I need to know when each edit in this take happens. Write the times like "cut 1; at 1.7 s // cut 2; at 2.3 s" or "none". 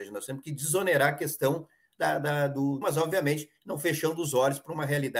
cut 1; at 2.8 s